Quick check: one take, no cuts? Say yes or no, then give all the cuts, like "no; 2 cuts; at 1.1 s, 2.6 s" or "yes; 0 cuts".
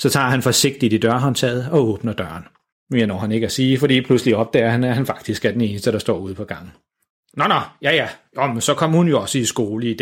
no; 1 cut; at 2.7 s